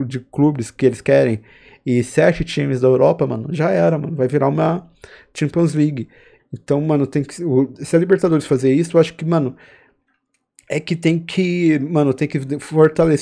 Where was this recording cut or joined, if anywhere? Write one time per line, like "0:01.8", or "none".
0:06.4